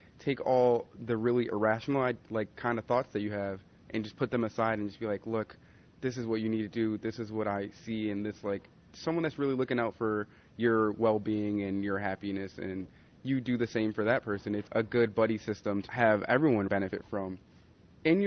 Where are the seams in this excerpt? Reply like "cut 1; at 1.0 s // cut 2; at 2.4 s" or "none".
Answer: cut 1; at 16.7 s